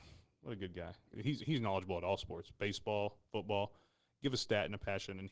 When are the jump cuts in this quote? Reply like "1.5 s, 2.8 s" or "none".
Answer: 1.1 s